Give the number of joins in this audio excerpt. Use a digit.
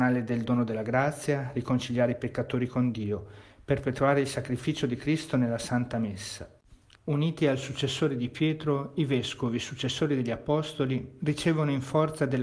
1